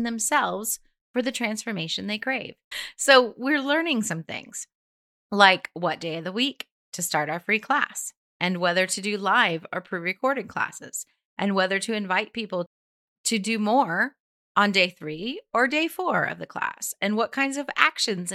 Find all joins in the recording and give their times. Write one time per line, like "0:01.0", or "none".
0:02.7